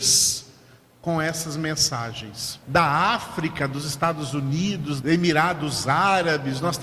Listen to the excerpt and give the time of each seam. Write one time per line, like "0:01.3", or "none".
0:02.6
0:05.0